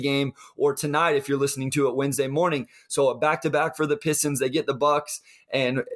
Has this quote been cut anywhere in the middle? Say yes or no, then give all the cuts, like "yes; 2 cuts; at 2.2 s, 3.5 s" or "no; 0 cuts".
no; 0 cuts